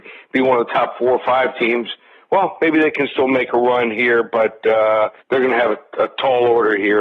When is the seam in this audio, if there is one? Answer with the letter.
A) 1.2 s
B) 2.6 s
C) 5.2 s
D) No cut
C